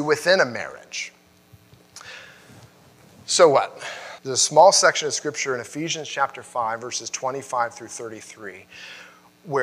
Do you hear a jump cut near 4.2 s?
yes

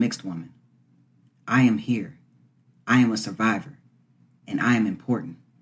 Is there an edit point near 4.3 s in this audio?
no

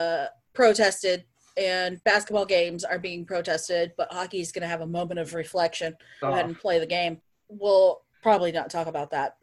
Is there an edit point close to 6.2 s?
yes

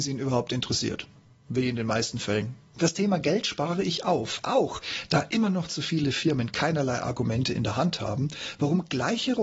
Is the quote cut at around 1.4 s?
no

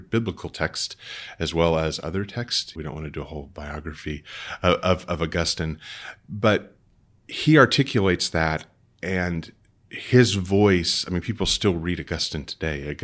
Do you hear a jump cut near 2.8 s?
yes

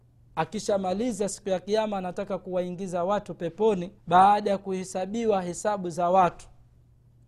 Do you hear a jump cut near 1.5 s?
no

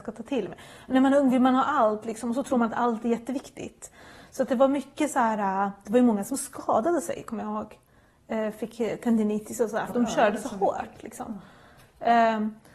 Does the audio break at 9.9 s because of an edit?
yes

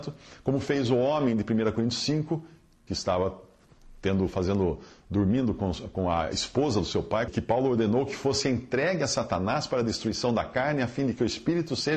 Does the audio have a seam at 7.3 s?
yes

